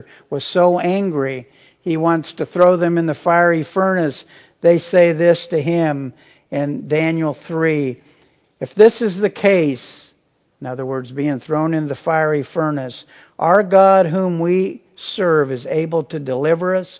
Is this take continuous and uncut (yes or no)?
yes